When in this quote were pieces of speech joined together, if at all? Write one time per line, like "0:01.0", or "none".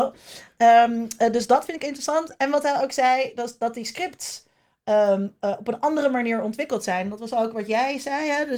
none